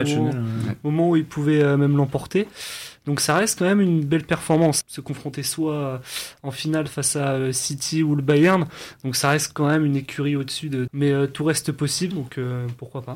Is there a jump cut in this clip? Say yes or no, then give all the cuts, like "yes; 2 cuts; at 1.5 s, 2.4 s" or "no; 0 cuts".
yes; 3 cuts; at 4.8 s, 10.9 s, 12.1 s